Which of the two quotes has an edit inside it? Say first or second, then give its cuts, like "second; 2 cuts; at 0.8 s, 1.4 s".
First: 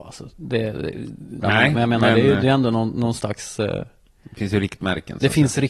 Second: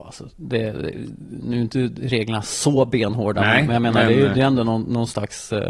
first; 1 cut; at 1.4 s